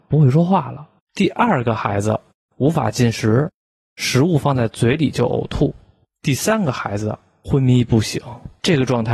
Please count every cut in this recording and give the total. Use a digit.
0